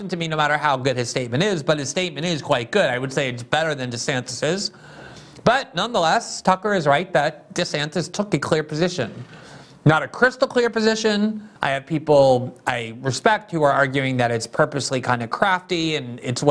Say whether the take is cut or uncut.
cut